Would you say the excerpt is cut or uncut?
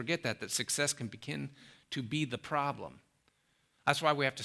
uncut